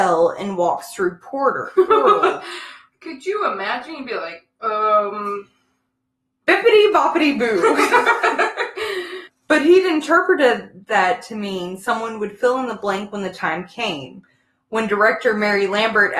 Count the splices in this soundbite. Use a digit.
1